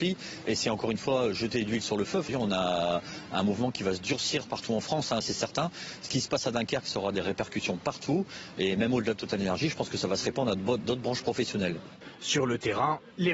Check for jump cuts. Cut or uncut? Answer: cut